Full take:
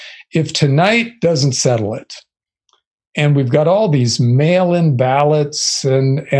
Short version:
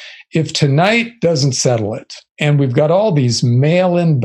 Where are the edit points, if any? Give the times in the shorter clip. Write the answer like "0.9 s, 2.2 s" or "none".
2.3 s